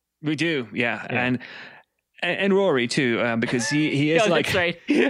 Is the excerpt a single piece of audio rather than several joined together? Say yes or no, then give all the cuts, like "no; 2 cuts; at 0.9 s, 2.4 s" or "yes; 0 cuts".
yes; 0 cuts